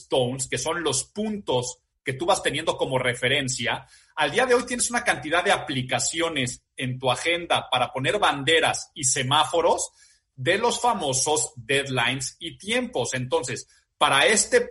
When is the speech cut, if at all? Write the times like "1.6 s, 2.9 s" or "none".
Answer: none